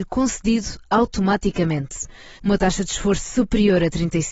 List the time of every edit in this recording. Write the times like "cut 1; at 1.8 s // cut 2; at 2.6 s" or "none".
cut 1; at 2.4 s